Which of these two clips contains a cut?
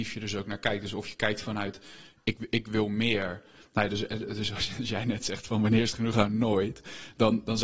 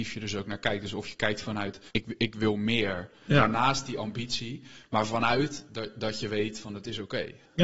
second; 2 cuts; at 1.9 s, 3.3 s

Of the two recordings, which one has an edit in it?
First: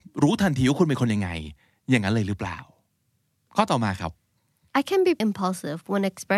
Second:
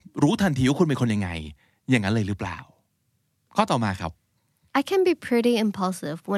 first; 1 cut; at 5.2 s

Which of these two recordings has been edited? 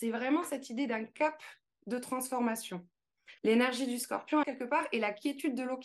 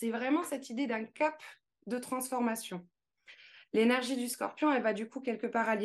first; 2 cuts; at 3.4 s, 4.4 s

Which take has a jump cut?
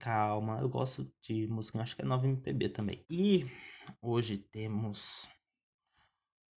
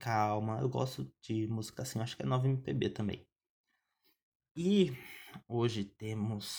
first; 2 cuts; at 1.7 s, 3.0 s

